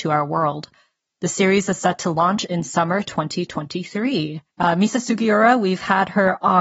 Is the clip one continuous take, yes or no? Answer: no